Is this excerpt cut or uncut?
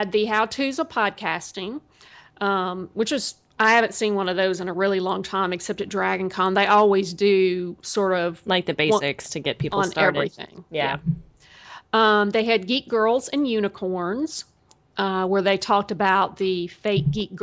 uncut